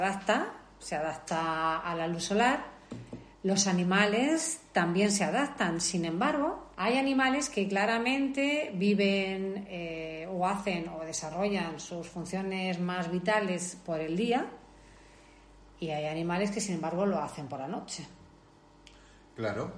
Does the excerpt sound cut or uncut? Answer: cut